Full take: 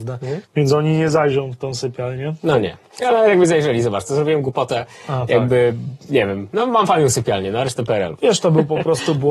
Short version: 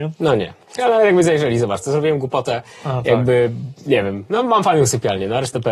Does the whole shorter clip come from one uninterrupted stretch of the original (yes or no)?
yes